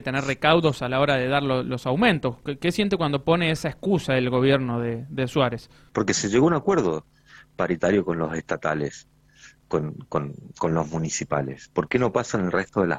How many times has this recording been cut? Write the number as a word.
one